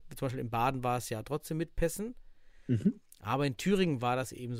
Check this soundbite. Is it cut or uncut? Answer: uncut